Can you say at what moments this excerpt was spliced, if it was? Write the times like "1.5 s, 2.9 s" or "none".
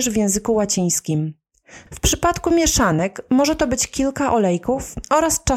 1.9 s